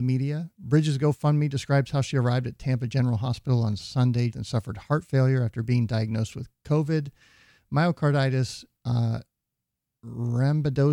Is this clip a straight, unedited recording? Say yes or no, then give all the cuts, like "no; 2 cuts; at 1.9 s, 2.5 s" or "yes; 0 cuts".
no; 1 cut; at 4.3 s